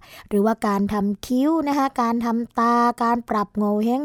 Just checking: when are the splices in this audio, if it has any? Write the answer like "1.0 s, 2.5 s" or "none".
none